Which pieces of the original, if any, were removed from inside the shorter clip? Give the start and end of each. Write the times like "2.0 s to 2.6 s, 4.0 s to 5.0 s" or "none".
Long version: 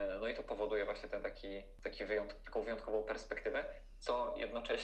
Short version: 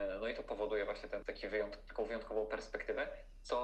1.2 s to 1.8 s